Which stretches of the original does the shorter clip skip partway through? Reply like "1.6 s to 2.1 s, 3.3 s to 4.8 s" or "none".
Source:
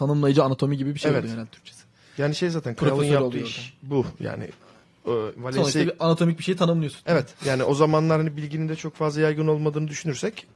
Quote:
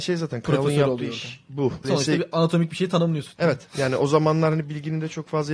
4.2 s to 5.5 s